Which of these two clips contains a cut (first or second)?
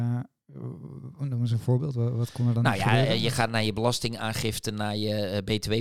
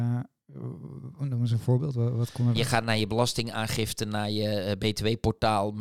second